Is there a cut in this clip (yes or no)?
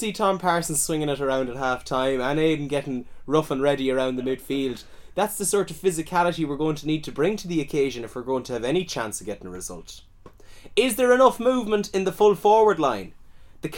no